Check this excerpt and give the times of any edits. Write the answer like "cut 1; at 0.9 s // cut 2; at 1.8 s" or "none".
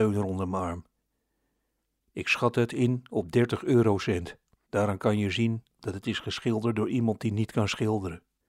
cut 1; at 4.6 s